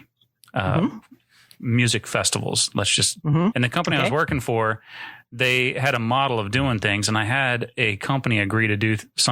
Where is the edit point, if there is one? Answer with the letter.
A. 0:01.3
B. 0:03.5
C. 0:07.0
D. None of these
B